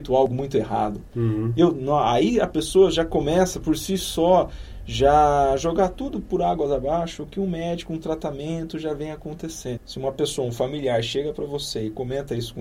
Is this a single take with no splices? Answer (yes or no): no